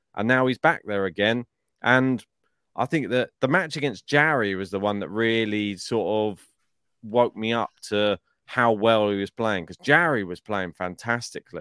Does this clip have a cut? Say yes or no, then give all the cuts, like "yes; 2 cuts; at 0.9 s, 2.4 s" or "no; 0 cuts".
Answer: yes; 1 cut; at 3.3 s